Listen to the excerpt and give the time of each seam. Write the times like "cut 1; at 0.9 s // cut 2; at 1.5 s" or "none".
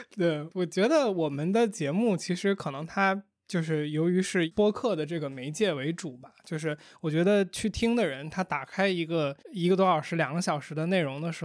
cut 1; at 9.4 s